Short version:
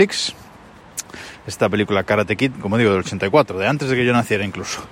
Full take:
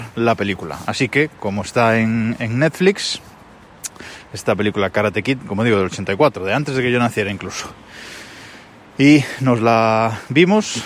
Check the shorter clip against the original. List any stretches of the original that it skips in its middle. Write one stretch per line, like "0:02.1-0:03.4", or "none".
none